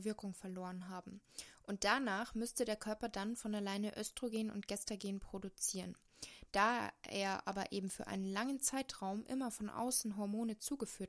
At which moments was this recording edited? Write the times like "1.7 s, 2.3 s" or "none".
none